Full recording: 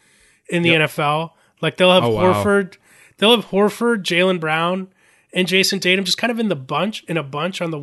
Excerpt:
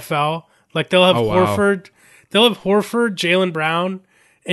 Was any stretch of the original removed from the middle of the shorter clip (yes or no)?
no